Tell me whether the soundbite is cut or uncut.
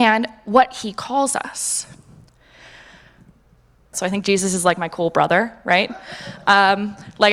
cut